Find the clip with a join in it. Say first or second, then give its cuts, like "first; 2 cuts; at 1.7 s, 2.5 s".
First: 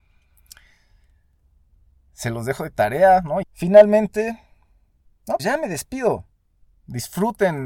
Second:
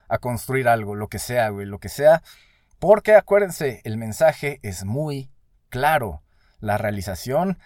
first; 2 cuts; at 3.4 s, 5.4 s